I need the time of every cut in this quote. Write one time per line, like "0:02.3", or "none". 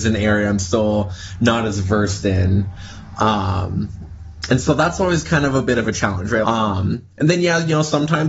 0:06.4